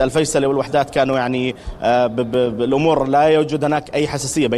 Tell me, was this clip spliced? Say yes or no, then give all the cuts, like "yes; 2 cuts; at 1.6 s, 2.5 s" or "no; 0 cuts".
no; 0 cuts